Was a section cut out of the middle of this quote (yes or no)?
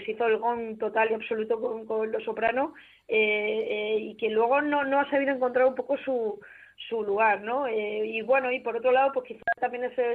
no